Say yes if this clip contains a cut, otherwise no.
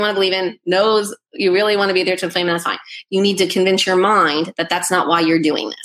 no